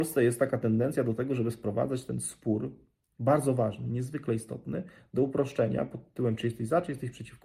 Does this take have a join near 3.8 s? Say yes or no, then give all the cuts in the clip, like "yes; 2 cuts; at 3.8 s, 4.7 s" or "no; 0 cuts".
no; 0 cuts